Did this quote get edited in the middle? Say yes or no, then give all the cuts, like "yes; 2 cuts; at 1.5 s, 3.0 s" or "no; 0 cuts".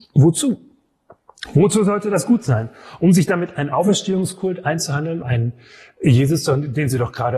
yes; 1 cut; at 5.2 s